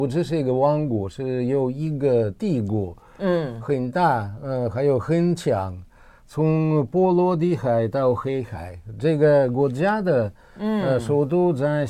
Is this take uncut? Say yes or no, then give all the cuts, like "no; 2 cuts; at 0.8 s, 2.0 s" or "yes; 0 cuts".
yes; 0 cuts